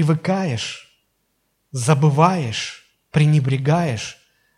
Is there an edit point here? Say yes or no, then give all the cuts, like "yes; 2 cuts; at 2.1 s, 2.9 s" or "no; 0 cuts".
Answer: no; 0 cuts